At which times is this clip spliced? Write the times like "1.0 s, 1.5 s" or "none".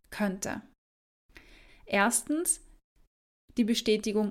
1.7 s